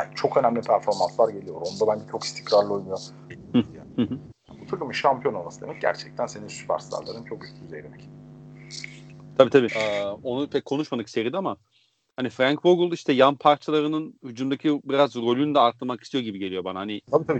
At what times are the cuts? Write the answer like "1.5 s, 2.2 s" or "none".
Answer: 3.3 s, 9.7 s